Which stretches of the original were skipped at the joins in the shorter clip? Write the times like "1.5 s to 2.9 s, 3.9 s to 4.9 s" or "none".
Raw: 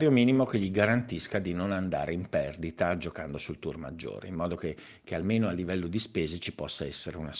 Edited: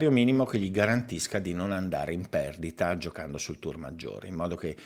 none

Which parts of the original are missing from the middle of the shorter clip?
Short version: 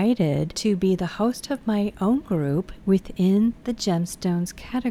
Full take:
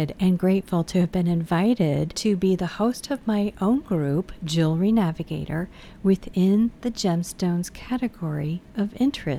4.4 s to 6.0 s

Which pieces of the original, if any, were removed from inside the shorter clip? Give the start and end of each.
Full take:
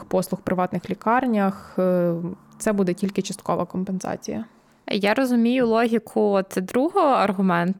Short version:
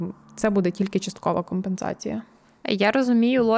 none

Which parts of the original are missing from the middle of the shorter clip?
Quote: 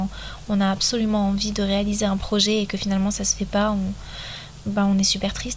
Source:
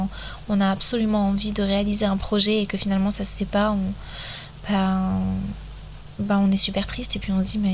4.6 s to 6.1 s

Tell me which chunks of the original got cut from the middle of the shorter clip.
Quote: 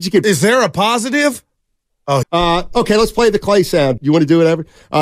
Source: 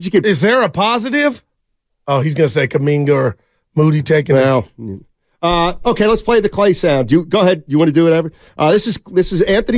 2.2 s to 5.3 s, 7.1 s to 7.6 s

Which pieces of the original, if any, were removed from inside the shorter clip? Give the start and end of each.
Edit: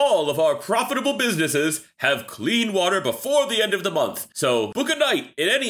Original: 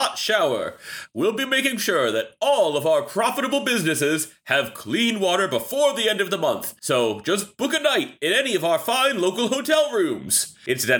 7.2 s to 7.6 s

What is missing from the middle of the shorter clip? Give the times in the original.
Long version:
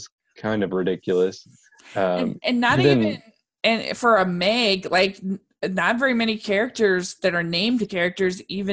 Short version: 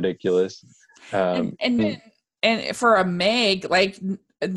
2.6 s to 3.0 s

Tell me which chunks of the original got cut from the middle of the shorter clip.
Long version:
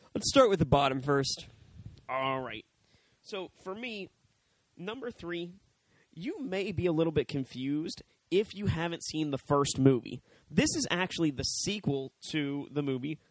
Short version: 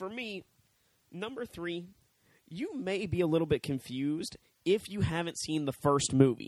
none

